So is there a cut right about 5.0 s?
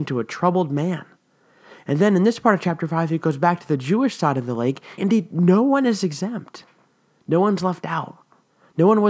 yes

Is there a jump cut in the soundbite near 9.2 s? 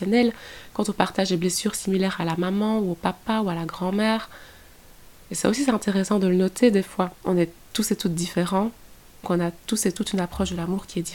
yes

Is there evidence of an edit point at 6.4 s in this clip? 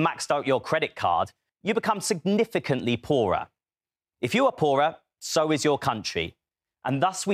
no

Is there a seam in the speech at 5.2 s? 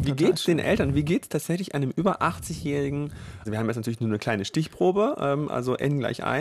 no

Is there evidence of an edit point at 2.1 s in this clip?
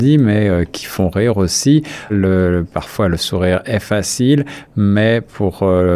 yes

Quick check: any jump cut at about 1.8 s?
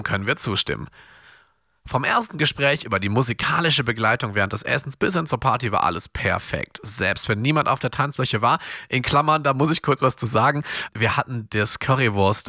no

